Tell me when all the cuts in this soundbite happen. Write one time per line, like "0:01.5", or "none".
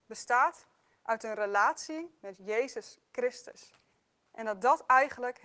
none